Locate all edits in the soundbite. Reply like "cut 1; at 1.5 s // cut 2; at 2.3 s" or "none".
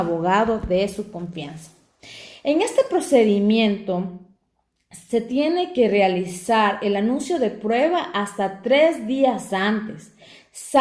none